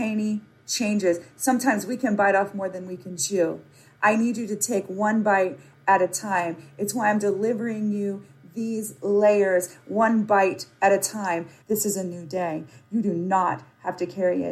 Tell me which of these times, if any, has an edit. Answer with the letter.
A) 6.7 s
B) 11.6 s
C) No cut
B